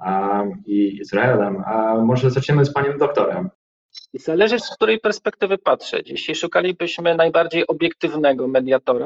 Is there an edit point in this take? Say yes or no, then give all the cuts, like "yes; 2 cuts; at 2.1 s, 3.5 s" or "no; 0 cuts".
no; 0 cuts